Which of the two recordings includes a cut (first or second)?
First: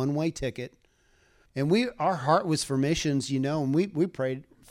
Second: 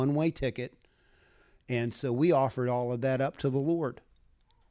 first